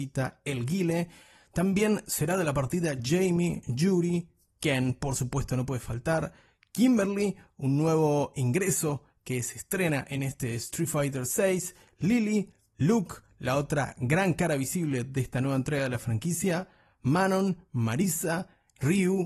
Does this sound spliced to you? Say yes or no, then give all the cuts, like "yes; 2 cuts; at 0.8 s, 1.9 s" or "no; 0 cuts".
no; 0 cuts